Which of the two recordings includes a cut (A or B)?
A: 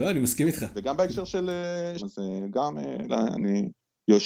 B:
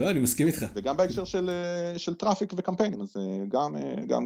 A